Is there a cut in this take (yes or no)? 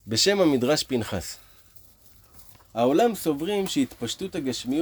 yes